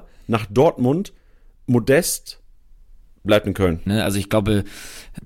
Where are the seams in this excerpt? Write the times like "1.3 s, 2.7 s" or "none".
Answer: 3.9 s